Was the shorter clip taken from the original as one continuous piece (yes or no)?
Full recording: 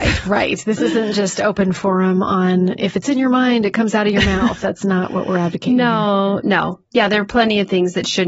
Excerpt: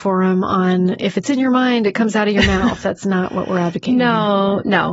yes